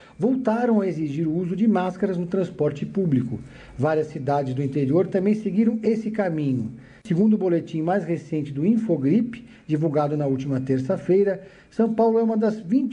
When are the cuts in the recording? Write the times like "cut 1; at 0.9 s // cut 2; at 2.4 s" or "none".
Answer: none